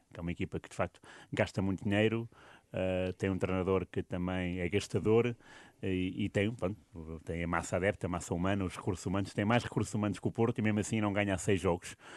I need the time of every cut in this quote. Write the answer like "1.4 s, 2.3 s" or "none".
none